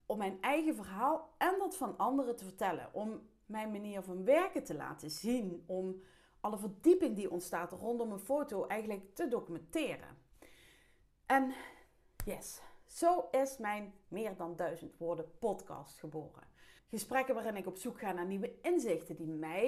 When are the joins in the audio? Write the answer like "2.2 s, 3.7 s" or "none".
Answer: 16.8 s